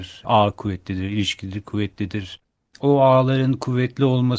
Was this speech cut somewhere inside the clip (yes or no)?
no